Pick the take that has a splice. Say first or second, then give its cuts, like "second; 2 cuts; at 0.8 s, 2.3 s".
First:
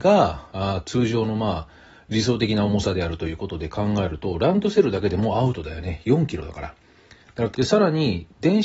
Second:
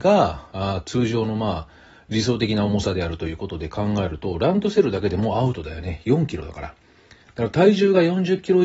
first; 1 cut; at 7.5 s